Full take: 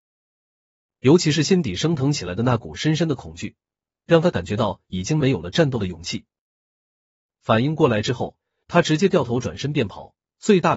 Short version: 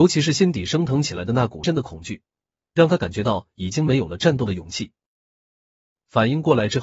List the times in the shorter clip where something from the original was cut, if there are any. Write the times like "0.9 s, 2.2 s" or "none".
1.6 s